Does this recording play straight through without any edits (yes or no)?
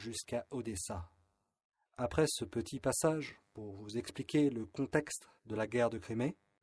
no